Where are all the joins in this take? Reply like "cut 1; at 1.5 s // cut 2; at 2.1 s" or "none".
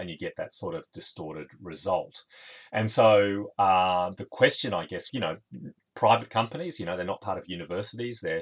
cut 1; at 5.1 s